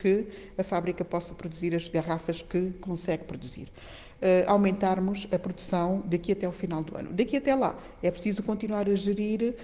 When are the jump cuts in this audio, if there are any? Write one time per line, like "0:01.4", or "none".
0:04.2